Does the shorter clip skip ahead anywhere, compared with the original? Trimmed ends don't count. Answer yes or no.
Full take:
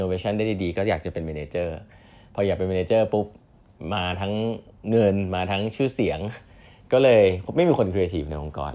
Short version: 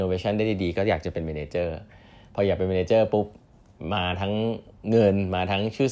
no